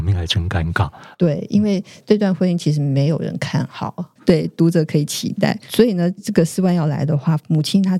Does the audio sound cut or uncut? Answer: cut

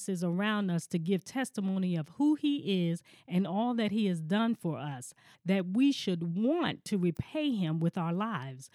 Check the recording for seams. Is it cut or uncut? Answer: cut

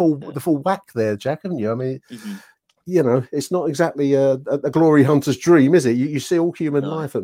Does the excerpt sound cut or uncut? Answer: uncut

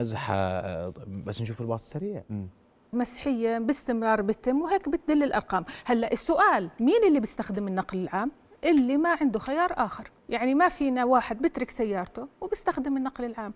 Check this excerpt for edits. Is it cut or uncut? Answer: cut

